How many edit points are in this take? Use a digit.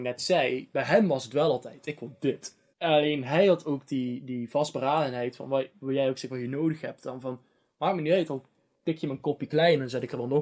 1